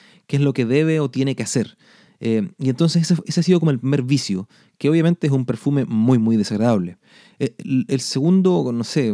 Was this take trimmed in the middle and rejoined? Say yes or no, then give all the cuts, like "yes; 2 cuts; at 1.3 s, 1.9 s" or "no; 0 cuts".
no; 0 cuts